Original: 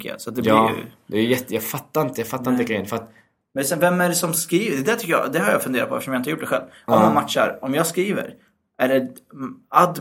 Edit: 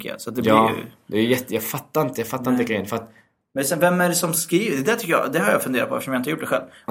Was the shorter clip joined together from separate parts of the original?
no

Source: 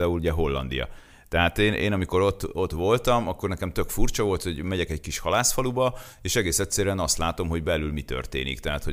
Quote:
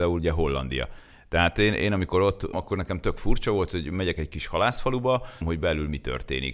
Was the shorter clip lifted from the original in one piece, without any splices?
no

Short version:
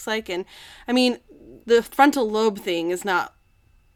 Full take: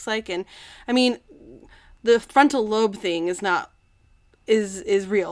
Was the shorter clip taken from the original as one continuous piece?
no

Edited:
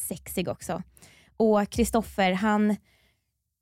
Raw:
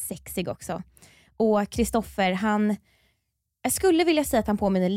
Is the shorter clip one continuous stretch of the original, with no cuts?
yes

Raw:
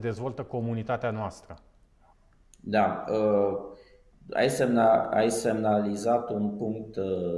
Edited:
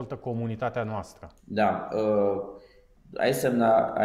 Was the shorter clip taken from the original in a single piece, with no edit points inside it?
no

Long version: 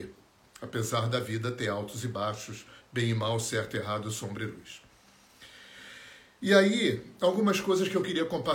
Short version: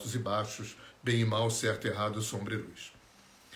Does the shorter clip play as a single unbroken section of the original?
yes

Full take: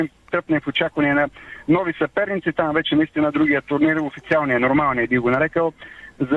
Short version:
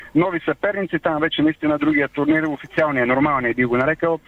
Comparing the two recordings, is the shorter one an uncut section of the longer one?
yes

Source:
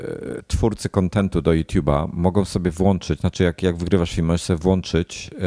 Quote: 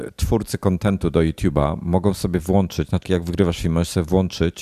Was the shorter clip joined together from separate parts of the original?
yes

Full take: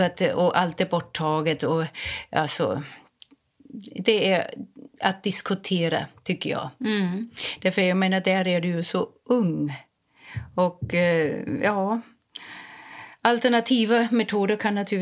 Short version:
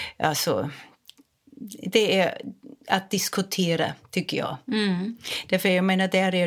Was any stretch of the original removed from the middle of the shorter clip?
no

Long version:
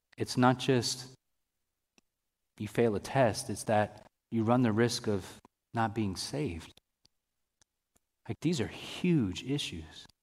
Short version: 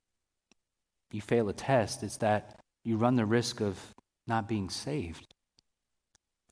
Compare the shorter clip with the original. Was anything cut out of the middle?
no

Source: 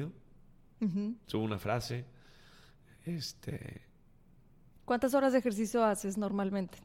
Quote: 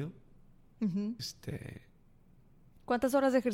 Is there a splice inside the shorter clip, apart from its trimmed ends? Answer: yes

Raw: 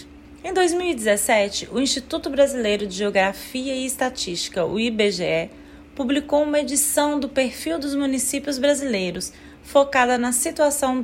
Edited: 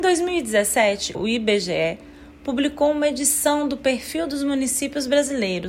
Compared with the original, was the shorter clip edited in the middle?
yes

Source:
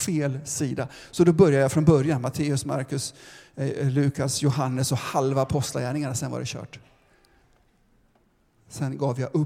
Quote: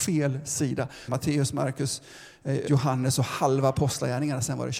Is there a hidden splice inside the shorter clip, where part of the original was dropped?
yes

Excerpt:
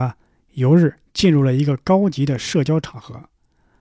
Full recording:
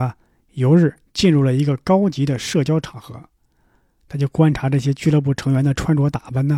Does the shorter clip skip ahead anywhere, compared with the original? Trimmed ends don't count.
no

